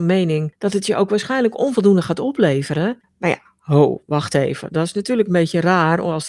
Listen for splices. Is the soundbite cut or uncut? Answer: cut